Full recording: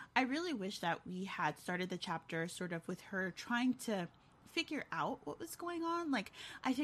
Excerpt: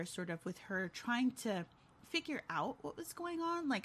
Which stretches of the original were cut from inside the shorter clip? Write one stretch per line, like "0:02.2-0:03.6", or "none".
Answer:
none